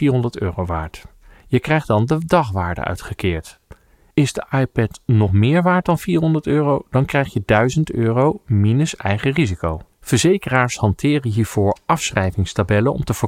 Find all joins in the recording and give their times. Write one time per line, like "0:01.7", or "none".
0:09.9

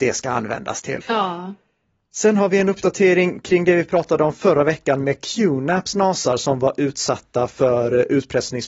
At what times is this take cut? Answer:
0:01.0

